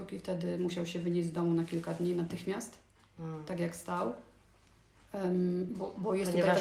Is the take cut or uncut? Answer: uncut